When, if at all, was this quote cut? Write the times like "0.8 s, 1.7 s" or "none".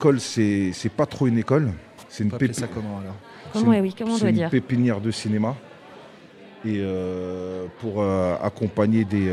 2.1 s